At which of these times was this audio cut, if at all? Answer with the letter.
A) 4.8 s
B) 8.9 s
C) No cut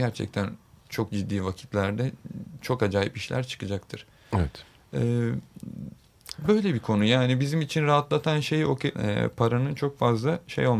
B